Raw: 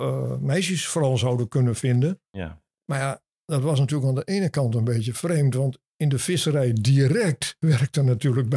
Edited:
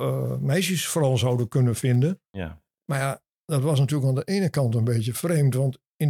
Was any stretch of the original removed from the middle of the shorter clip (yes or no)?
no